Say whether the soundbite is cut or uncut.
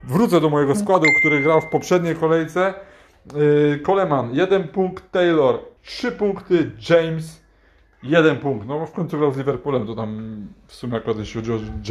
cut